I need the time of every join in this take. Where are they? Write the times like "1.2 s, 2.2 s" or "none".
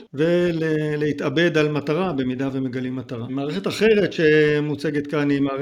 3.3 s